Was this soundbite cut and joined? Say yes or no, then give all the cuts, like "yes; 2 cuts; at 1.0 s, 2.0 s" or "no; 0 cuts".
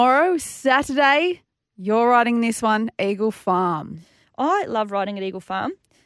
no; 0 cuts